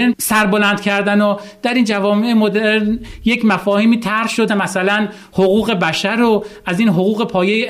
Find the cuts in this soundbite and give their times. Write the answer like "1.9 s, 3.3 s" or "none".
4.5 s